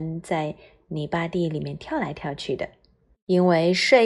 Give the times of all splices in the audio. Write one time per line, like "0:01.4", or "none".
0:03.1

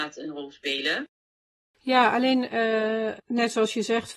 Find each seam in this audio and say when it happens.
0:03.2

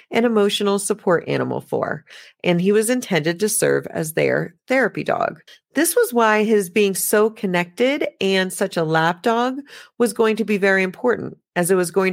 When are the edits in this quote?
none

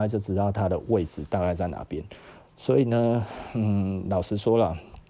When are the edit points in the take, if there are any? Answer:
none

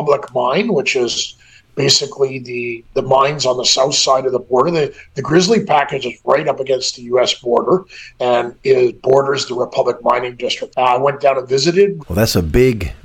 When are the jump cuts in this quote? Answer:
0:10.7
0:12.0

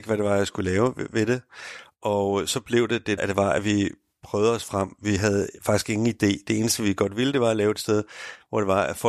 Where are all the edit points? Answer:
0:03.2

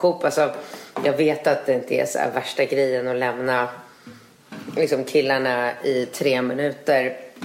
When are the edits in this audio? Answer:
none

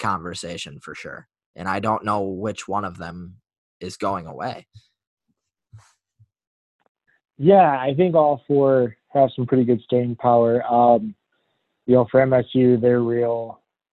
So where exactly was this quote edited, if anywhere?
none

